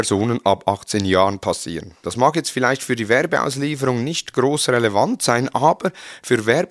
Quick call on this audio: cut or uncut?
cut